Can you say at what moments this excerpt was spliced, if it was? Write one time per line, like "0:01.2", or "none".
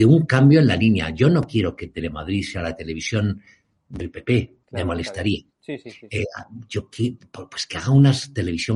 0:04.6